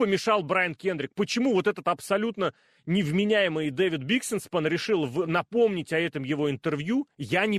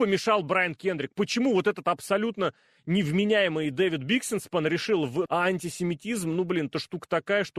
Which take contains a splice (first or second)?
second